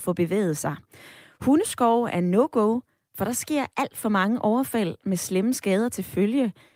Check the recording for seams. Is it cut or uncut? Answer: uncut